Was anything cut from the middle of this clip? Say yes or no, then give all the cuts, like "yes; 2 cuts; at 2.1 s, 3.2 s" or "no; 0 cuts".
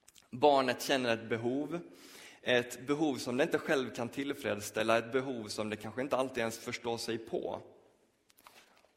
no; 0 cuts